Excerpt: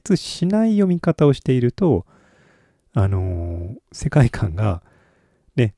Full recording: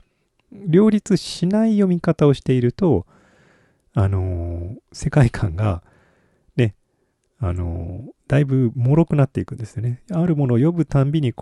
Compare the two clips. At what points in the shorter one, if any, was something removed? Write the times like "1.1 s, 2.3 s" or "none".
none